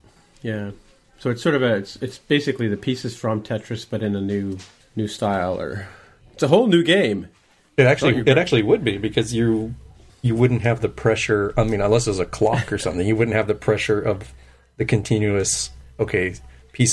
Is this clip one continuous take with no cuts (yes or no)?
yes